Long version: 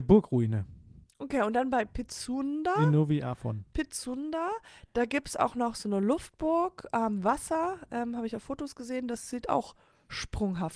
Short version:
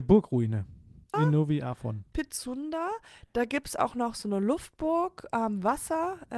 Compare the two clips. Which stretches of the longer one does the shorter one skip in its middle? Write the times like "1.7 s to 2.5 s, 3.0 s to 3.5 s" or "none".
1.1 s to 2.7 s